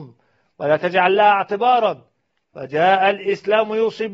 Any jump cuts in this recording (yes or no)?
no